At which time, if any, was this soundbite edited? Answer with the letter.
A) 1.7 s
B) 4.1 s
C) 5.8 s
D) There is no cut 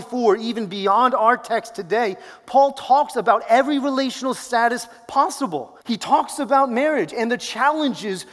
C